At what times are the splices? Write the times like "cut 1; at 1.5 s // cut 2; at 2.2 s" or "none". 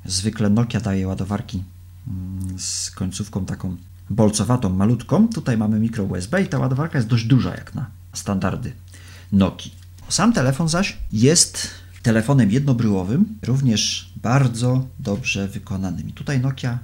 none